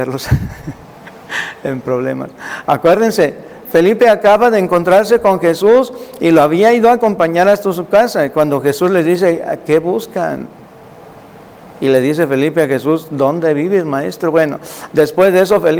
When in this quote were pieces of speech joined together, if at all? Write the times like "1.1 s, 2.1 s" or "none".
3.6 s